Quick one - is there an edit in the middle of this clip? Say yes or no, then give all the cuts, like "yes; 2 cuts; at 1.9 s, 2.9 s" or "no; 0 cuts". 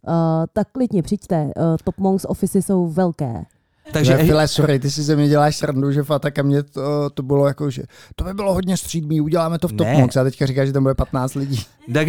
yes; 1 cut; at 3.8 s